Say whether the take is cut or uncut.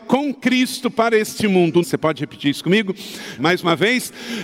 cut